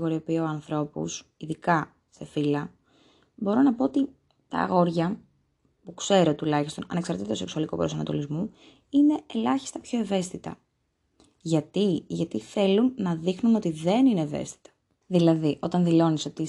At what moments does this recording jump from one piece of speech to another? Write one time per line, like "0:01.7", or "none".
0:15.0